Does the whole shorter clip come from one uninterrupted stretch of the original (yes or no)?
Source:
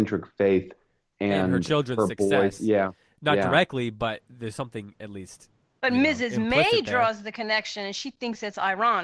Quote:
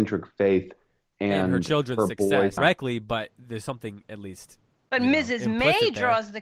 no